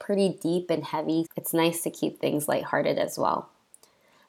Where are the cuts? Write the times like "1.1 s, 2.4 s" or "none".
1.2 s